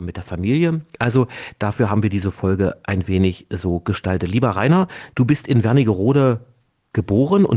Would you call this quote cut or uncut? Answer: uncut